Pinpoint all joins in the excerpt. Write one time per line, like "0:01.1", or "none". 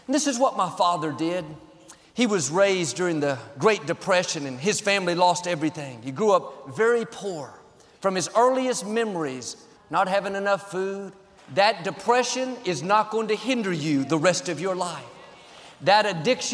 0:09.8
0:11.4